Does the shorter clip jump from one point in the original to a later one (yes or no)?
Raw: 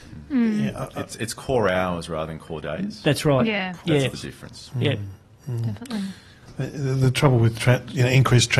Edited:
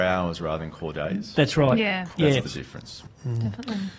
yes